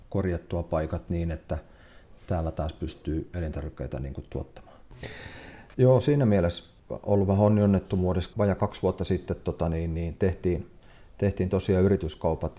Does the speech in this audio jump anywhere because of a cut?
yes; 2 cuts; at 5.7 s, 8.3 s

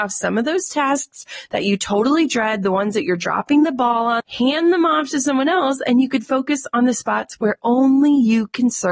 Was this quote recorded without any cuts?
no; 1 cut; at 4.2 s

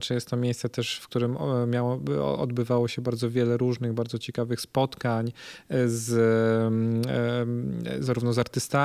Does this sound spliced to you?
no; 0 cuts

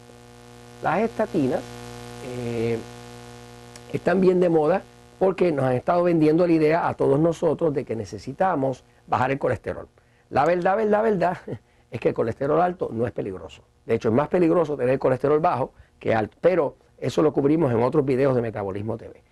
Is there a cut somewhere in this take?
yes; 1 cut; at 16.3 s

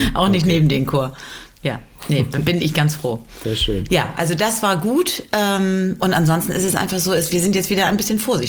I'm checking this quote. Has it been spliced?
yes; 1 cut; at 7.3 s

